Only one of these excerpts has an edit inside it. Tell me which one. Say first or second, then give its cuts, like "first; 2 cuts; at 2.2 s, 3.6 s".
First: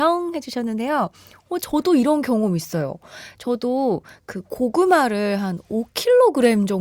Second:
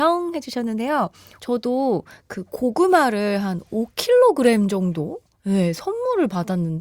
second; 1 cut; at 1.4 s